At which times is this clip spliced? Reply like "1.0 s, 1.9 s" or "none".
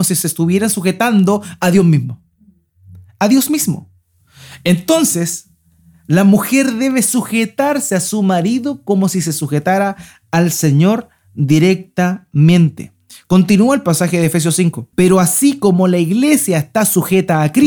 14.9 s